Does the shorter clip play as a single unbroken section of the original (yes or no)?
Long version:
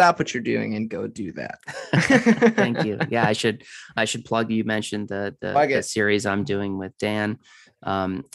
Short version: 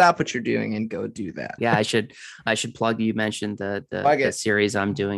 no